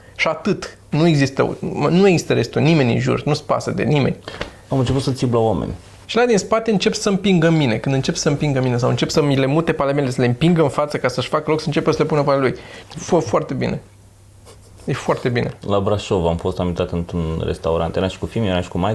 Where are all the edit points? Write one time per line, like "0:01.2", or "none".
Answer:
0:06.0
0:12.8